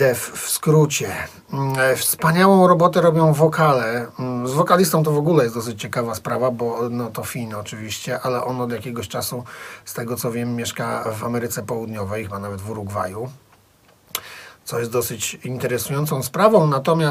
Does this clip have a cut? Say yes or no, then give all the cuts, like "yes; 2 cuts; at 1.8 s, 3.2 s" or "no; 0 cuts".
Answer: no; 0 cuts